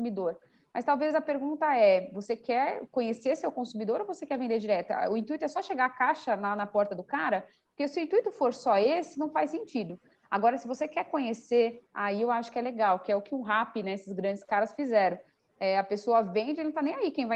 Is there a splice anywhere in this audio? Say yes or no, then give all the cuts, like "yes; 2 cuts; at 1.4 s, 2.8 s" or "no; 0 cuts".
no; 0 cuts